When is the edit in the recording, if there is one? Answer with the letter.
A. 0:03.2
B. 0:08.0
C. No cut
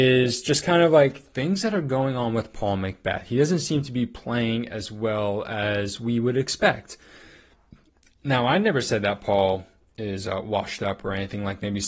C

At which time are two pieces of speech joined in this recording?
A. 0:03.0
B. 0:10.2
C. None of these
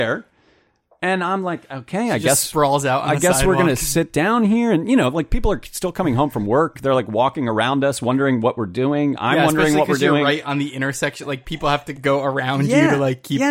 C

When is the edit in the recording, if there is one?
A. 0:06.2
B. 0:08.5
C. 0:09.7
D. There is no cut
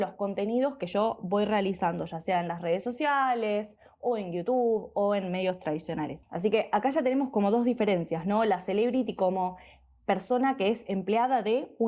A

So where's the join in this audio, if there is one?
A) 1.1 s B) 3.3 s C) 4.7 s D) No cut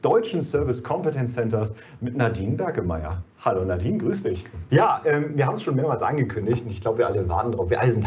C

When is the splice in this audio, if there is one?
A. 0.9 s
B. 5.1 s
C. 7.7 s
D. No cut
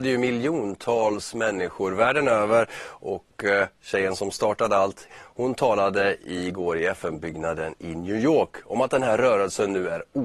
B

